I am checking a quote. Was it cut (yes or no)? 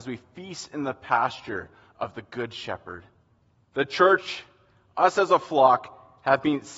yes